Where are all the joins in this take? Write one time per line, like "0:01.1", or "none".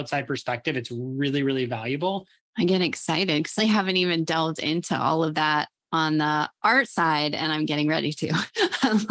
0:02.4
0:03.6